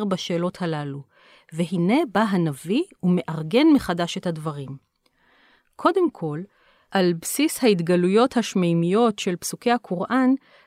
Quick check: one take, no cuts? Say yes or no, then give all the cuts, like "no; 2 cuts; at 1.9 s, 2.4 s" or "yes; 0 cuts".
yes; 0 cuts